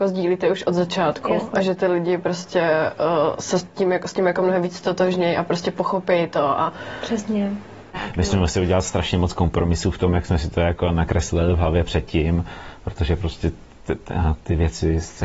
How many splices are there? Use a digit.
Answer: 1